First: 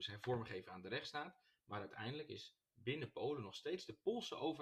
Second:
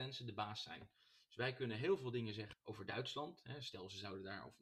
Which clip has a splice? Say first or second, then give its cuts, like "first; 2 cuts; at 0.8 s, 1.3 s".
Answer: second; 1 cut; at 2.5 s